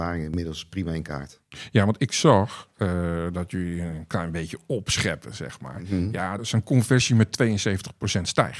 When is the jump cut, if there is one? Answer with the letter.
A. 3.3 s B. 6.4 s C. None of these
B